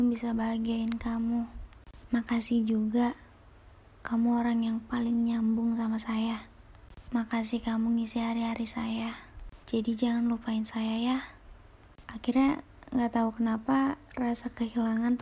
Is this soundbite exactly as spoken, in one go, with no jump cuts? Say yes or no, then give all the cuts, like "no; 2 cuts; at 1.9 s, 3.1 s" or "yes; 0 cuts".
no; 2 cuts; at 9.6 s, 12.0 s